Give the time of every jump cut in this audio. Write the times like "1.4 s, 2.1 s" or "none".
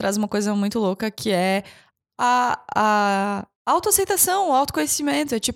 3.5 s